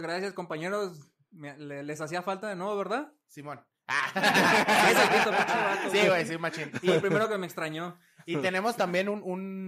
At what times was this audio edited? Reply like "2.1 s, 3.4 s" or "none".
none